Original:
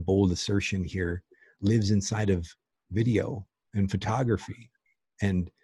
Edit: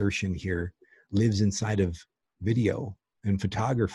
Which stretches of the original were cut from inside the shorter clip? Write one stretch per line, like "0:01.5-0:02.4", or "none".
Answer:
none